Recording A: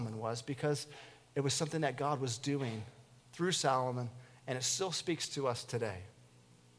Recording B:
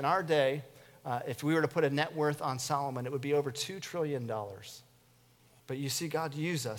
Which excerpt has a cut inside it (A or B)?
B